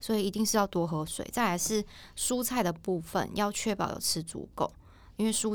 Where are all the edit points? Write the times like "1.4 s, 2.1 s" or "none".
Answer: none